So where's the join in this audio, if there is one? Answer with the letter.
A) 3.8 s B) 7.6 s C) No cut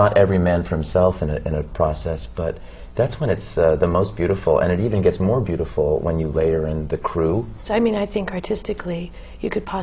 B